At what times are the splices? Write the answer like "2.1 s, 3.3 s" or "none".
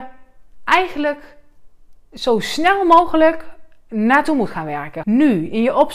5.0 s

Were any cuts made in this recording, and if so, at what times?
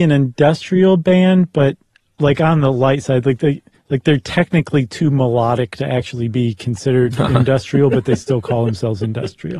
none

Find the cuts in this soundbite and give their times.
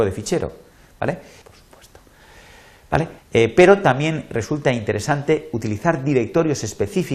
1.4 s, 3.2 s

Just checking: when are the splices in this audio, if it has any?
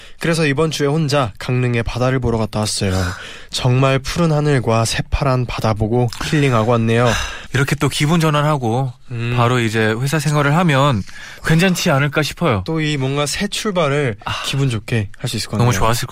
7.5 s

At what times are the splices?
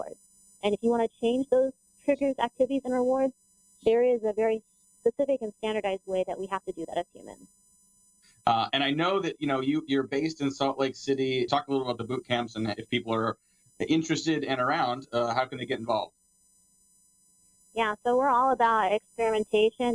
11.5 s

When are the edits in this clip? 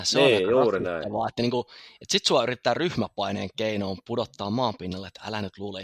none

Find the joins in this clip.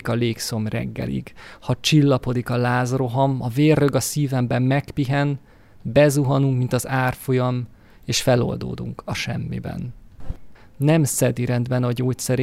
10.6 s

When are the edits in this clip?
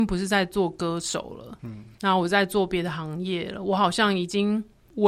none

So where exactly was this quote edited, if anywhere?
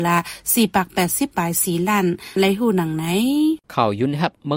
3.6 s

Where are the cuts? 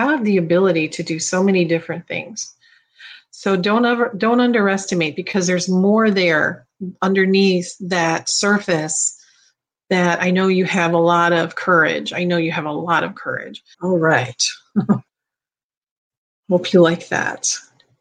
13.7 s, 15.1 s

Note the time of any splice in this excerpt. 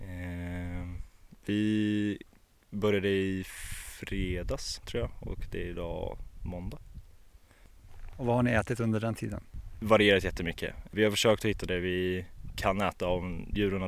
none

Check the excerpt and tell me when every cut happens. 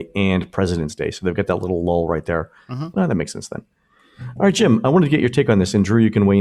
2.9 s

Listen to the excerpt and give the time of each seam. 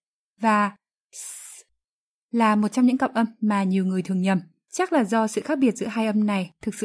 none

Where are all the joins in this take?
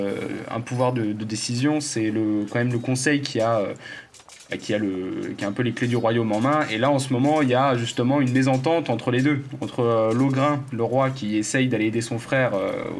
none

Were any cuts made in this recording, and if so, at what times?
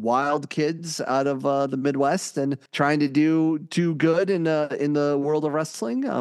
2.7 s

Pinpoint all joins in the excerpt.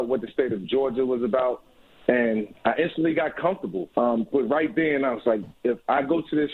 3.9 s, 5.5 s

